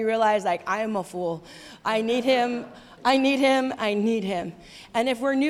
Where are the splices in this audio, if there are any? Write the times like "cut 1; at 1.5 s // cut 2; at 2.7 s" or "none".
cut 1; at 3.8 s